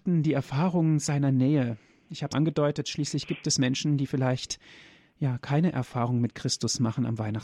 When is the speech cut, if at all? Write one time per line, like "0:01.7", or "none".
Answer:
0:02.3